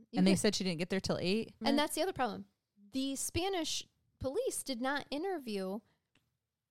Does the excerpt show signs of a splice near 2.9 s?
no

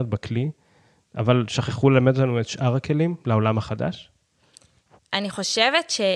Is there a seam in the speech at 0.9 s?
no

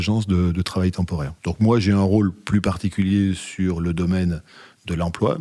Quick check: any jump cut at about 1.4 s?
yes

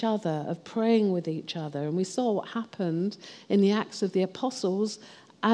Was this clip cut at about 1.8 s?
no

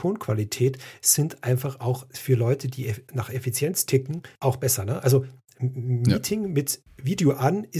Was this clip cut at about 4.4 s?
yes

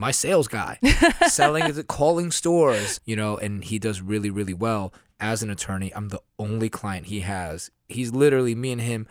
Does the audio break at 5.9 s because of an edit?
no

